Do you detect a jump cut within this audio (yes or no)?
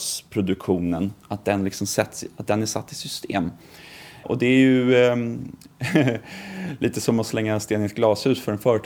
no